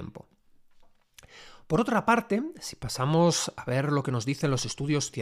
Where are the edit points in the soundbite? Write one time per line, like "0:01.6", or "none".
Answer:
none